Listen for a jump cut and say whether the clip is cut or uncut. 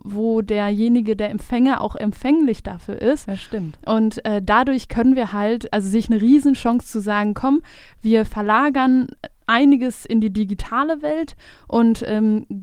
uncut